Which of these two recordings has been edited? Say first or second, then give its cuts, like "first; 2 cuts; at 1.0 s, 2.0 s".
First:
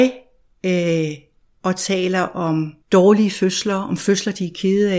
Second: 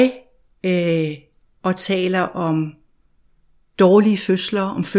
first; 1 cut; at 2.8 s